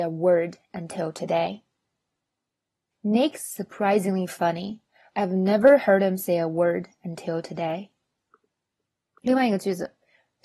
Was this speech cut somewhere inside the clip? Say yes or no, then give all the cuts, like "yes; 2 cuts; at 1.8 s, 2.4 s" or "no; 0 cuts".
no; 0 cuts